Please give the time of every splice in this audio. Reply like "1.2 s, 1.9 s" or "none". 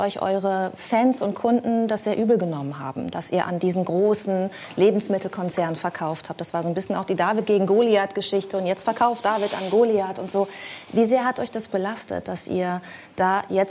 none